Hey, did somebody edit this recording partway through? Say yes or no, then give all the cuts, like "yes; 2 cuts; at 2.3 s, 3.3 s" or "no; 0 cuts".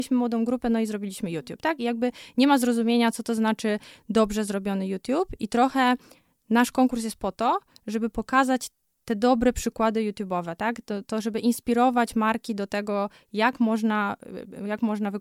no; 0 cuts